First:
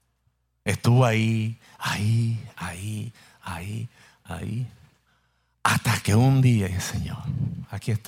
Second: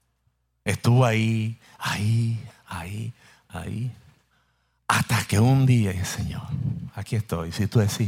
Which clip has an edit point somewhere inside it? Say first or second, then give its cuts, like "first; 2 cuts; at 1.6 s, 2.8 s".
second; 1 cut; at 2.5 s